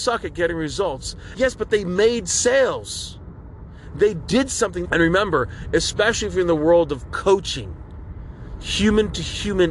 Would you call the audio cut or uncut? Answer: cut